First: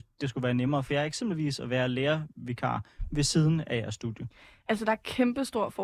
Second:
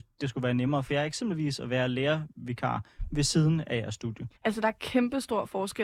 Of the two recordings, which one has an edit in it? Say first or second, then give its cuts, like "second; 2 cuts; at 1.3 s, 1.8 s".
second; 1 cut; at 4.4 s